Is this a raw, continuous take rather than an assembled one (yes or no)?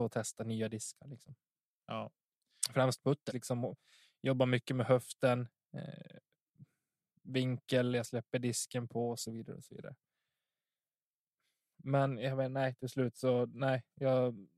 no